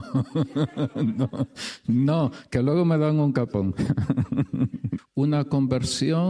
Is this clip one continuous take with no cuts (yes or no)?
no